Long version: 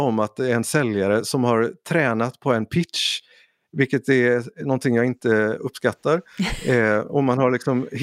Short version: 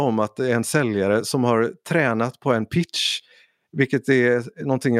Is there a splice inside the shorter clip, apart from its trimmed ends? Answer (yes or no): no